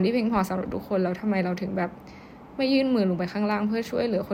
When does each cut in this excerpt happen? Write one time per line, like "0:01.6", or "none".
none